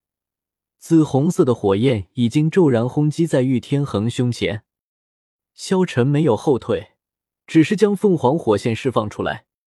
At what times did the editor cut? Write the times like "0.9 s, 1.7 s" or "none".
none